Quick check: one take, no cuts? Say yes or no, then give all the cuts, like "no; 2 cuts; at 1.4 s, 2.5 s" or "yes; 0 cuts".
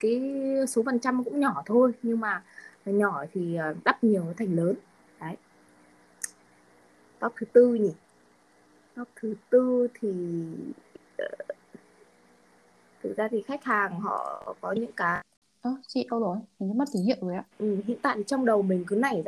no; 1 cut; at 17.5 s